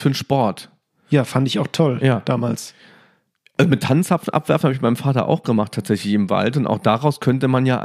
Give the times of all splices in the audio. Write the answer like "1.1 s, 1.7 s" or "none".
none